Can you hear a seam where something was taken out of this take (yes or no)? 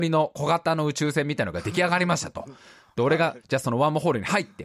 no